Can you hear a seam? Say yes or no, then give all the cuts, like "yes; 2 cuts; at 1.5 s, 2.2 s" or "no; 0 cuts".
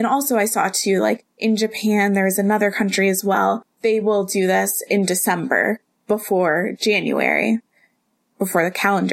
no; 0 cuts